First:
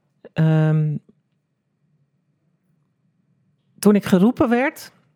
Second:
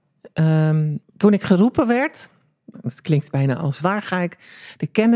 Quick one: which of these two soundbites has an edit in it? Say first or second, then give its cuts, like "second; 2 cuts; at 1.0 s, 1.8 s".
second; 2 cuts; at 1.1 s, 3.8 s